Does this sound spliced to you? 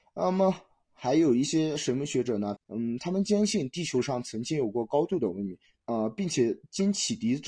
yes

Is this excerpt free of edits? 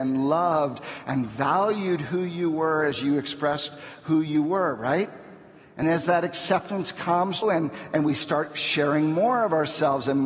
no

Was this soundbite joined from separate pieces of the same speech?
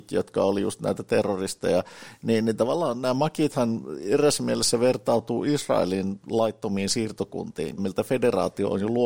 yes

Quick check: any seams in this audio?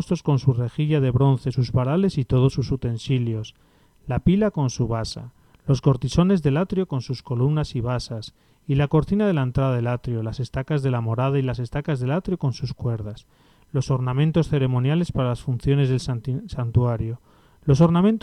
no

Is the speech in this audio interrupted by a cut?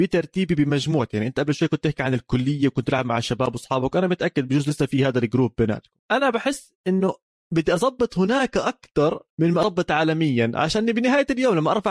yes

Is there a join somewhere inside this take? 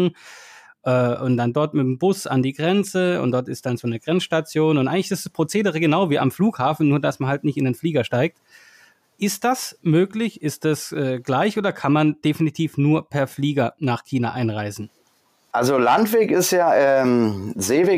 no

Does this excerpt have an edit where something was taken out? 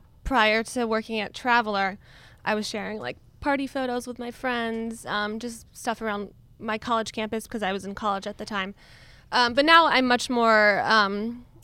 no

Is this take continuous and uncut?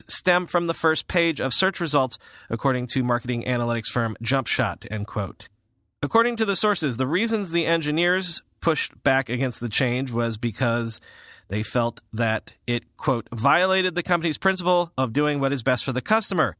yes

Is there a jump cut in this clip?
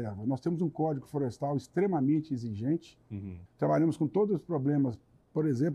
yes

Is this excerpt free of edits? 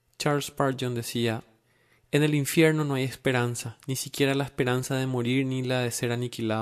yes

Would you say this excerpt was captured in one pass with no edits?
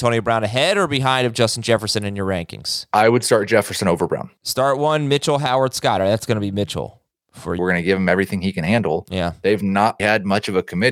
no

